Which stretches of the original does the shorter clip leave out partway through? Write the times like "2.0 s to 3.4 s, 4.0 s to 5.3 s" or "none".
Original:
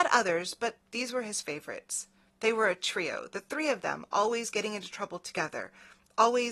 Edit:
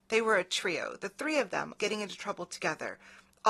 4.1 s to 4.5 s